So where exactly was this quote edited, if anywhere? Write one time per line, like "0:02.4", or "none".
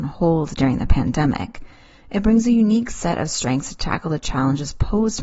none